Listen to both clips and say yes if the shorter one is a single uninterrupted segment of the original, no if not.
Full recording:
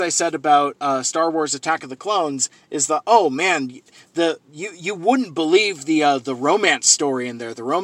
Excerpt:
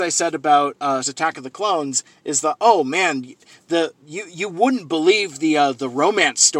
no